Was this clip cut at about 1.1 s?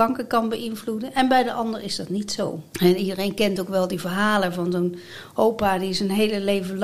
no; 1 cut; at 2.7 s

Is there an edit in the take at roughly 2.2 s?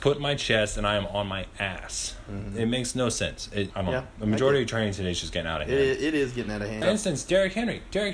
no; 2 cuts; at 3.7 s, 6.8 s

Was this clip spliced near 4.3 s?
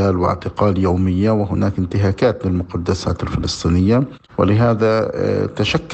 yes; 1 cut; at 4.3 s

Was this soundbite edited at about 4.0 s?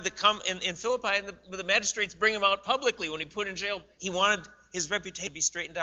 yes; 1 cut; at 4.0 s

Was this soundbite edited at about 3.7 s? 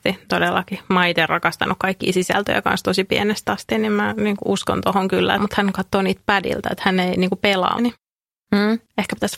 no; 2 cuts; at 5.4 s, 7.8 s

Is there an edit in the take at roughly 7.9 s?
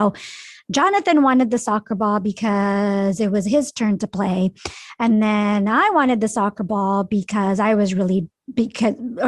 no; 0 cuts

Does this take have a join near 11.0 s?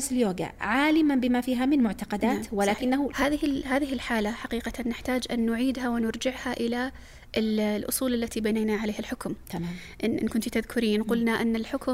no; 1 cut; at 3.1 s

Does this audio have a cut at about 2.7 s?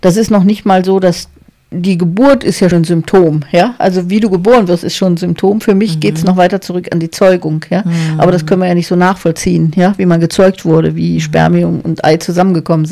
yes; 1 cut; at 2.7 s

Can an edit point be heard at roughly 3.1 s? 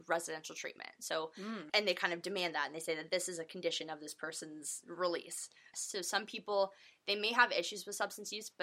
no; 2 cuts; at 1.7 s, 5.7 s

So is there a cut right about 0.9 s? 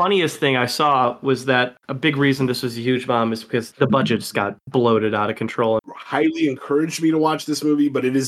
no; 1 cut; at 5.8 s

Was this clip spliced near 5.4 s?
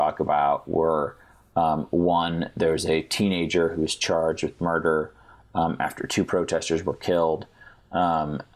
no; 0 cuts

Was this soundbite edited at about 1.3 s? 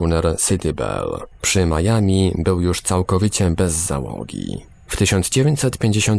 yes; 1 cut; at 1.3 s

